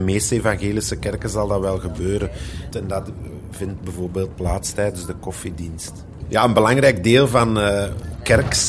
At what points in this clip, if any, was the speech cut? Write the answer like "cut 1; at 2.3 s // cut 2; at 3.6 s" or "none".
cut 1; at 2.7 s // cut 2; at 6.2 s